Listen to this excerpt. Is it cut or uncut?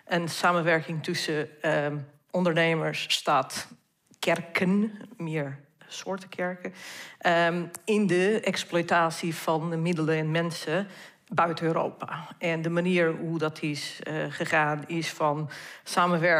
uncut